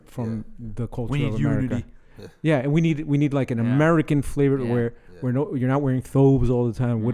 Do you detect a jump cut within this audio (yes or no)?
no